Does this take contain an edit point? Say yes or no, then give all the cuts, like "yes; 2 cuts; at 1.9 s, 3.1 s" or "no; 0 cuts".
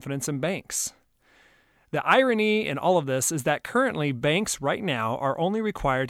no; 0 cuts